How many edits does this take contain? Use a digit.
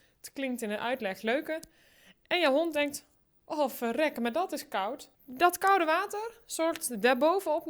1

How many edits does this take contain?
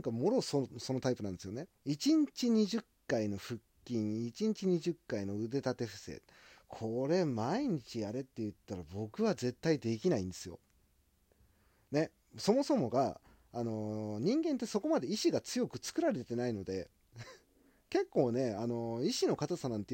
1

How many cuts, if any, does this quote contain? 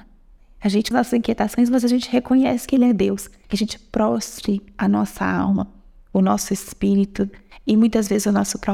2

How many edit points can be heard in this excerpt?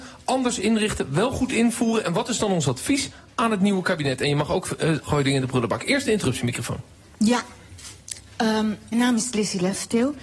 2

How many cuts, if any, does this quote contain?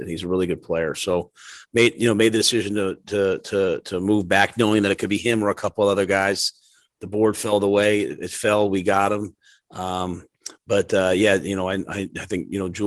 1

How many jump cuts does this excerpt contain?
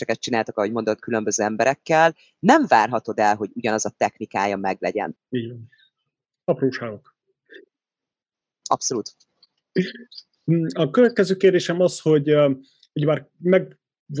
1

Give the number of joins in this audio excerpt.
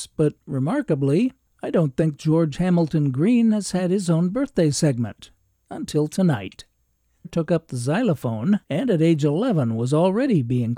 2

